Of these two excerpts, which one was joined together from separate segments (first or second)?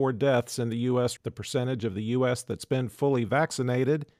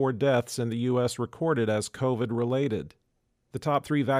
first